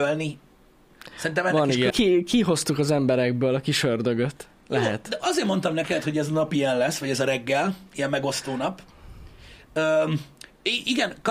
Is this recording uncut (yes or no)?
no